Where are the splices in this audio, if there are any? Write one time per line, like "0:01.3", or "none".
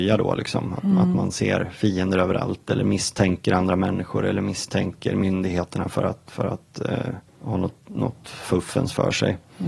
0:07.3